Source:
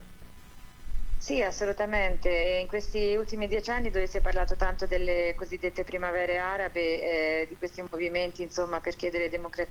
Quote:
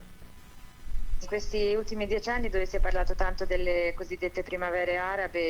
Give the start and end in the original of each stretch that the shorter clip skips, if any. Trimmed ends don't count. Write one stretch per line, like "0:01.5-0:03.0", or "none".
0:01.2-0:02.6